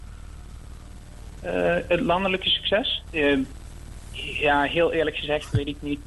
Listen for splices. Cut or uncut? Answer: cut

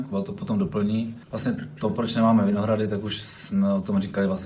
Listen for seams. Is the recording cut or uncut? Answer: uncut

